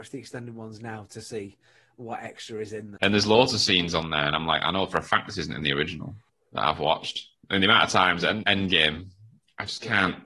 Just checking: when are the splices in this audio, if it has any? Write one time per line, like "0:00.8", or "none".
0:03.0
0:08.4

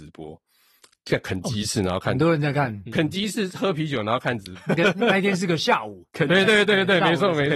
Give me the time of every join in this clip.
0:06.5

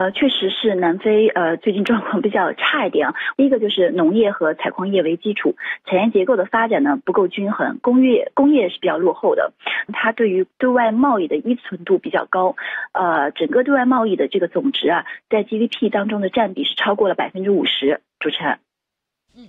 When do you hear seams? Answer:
0:03.3
0:09.9

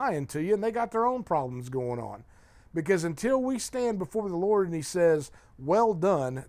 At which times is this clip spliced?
none

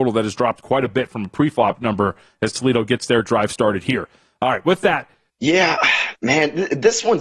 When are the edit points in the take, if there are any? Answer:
0:05.3

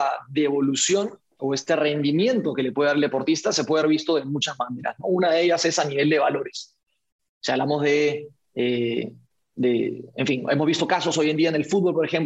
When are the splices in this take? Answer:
0:07.2

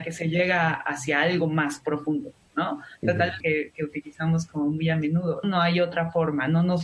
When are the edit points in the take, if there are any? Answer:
0:03.4
0:05.4

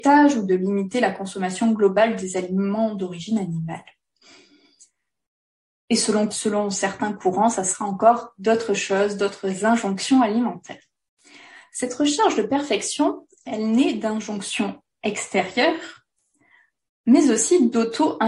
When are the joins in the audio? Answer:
0:06.3

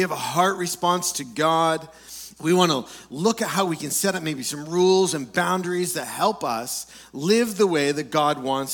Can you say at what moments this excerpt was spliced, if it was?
0:02.4

